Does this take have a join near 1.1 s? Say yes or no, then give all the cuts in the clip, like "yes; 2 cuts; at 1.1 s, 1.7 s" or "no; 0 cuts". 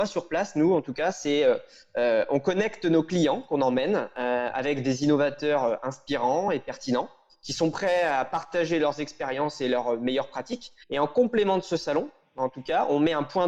no; 1 cut; at 10.8 s